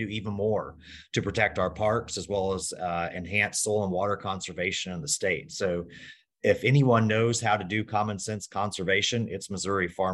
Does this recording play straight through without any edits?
yes; 0 cuts

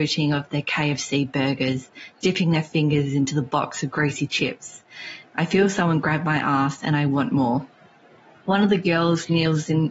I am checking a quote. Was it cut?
yes; 2 cuts; at 5.2 s, 8.4 s

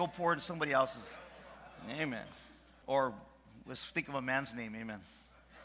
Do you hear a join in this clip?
yes; 1 cut; at 2.8 s

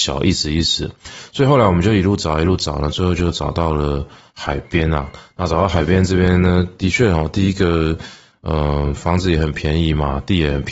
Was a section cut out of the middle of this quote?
no; 0 cuts

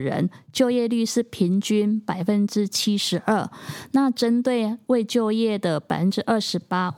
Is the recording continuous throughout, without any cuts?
yes; 0 cuts

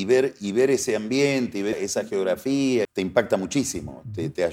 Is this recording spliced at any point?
yes; 2 cuts; at 1.7 s, 2.8 s

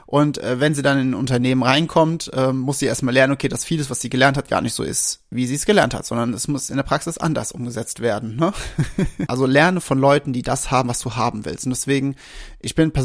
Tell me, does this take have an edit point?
yes; 1 cut; at 9.3 s

